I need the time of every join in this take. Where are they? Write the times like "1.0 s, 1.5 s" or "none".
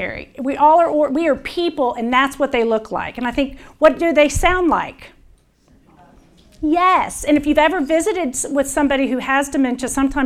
none